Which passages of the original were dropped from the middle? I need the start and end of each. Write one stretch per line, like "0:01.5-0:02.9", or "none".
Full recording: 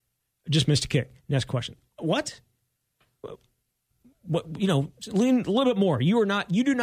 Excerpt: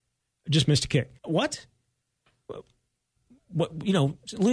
0:01.2-0:01.9